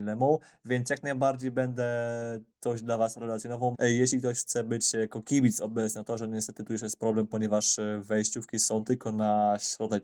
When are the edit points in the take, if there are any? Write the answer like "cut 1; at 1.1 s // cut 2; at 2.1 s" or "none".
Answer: cut 1; at 3.7 s